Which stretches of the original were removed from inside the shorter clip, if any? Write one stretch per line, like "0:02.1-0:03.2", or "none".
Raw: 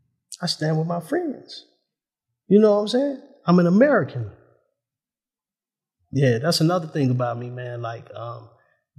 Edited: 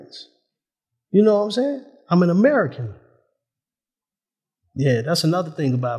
none